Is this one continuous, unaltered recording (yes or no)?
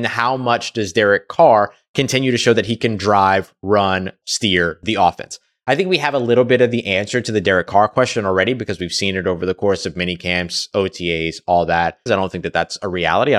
no